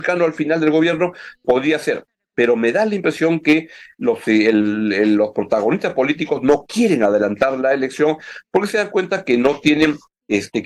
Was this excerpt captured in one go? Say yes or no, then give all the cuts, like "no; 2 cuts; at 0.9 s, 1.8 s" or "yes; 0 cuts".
yes; 0 cuts